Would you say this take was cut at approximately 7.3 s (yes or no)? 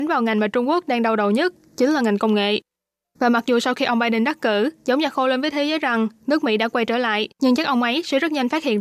yes